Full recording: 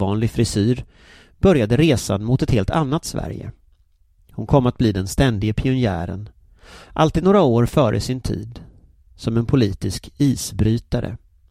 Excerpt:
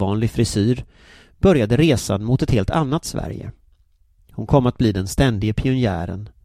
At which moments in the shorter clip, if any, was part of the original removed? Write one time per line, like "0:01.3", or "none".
none